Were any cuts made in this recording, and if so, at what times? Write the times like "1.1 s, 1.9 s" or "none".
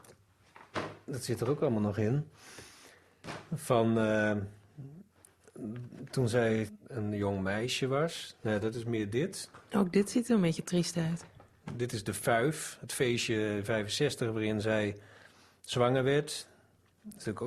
none